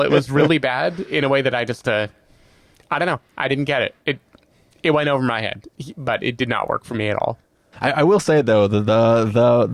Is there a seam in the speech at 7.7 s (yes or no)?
yes